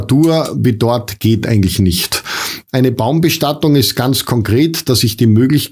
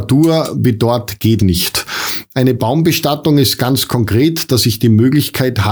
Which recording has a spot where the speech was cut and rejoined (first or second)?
second